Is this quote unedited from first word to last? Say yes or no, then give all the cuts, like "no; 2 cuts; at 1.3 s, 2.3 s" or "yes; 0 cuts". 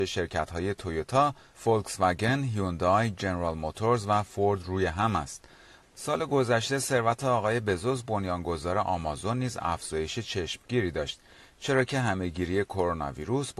no; 1 cut; at 5.8 s